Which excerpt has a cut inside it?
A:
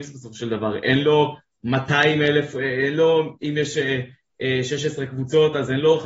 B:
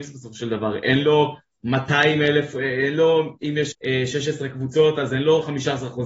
B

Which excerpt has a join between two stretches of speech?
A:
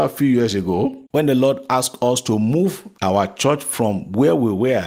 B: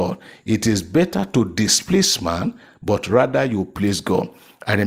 A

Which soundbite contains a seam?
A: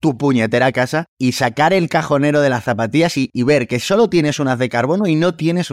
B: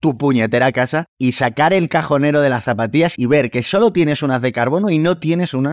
B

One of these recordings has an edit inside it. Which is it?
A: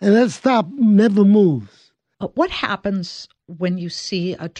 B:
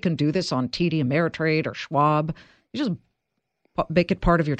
A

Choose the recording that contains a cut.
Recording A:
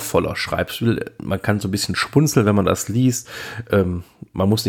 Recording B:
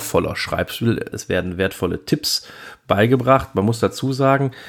B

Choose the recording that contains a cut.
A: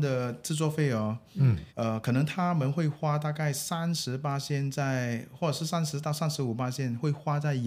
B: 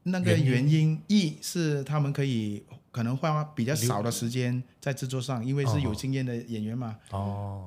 A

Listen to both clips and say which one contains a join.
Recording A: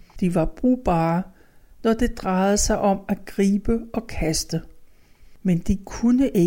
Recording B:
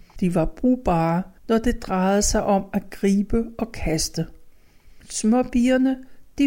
B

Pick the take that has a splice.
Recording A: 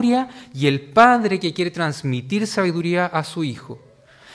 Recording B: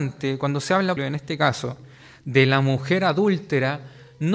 B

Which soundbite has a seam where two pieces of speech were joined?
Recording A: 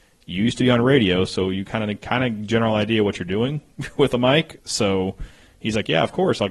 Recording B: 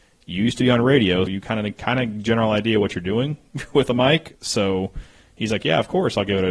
B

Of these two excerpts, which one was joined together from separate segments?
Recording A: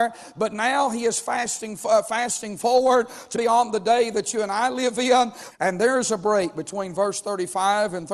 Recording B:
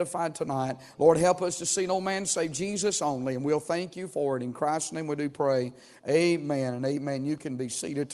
A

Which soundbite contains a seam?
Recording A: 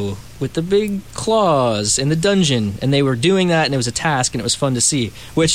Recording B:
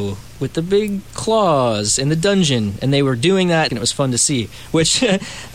B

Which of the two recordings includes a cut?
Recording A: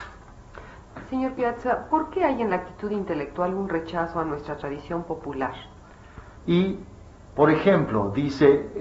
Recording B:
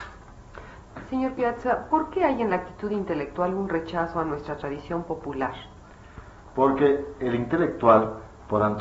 A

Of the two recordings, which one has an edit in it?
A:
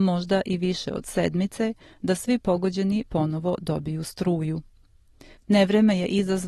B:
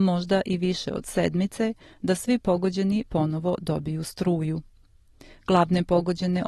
A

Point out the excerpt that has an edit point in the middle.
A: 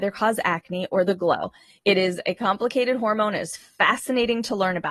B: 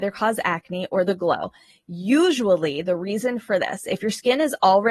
A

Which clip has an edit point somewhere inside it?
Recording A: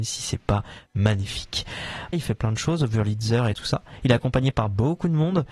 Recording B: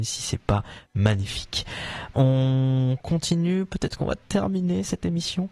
A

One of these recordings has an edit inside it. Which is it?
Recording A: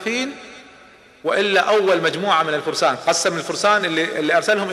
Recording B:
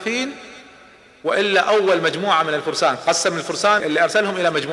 B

